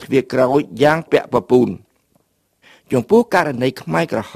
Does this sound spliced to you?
yes; 1 cut; at 1.1 s

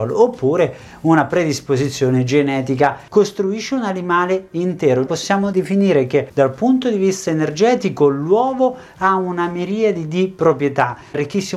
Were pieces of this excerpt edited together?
yes; 2 cuts; at 3.1 s, 5.1 s

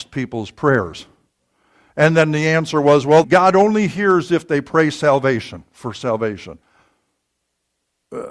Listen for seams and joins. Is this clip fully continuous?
no; 1 cut; at 3.2 s

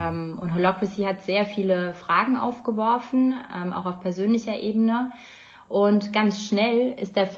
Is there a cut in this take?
no; 0 cuts

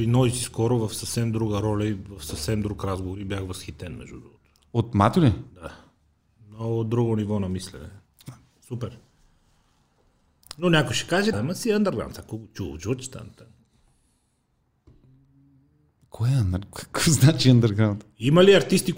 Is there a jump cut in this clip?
yes; 1 cut; at 11.3 s

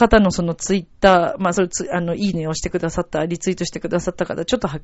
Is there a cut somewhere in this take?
no; 0 cuts

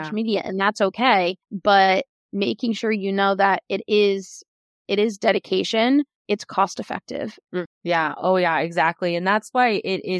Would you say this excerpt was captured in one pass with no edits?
no; 3 cuts; at 1.4 s, 6.2 s, 7.7 s

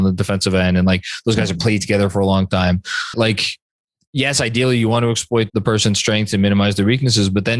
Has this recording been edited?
yes; 2 cuts; at 3.1 s, 5.5 s

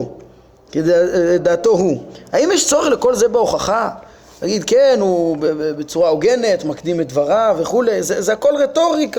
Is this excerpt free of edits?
yes; 0 cuts

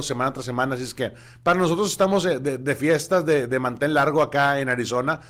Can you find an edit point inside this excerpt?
no; 0 cuts

